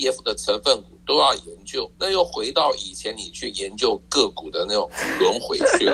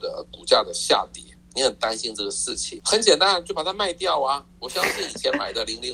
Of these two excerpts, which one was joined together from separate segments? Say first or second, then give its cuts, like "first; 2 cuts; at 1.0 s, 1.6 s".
first; 1 cut; at 1.9 s